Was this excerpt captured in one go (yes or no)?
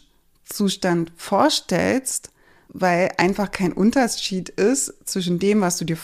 no